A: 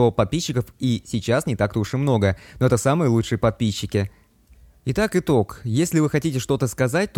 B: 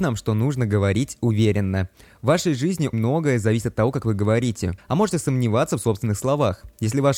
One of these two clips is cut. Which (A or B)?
B